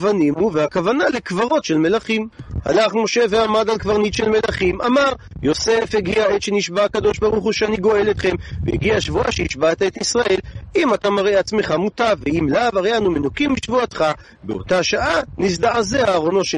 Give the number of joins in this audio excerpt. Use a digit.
0